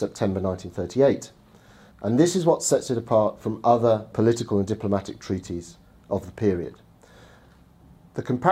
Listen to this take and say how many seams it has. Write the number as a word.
one